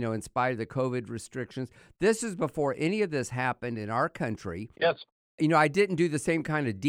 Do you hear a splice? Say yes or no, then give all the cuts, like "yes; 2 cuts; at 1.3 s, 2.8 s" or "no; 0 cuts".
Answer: yes; 1 cut; at 5.2 s